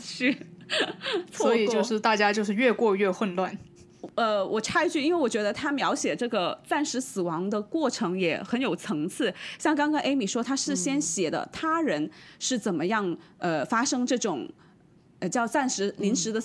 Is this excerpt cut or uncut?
uncut